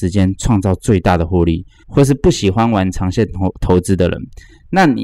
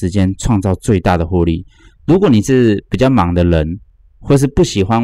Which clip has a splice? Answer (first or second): first